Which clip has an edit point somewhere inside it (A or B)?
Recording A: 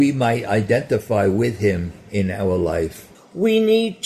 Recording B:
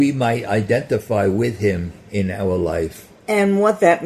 A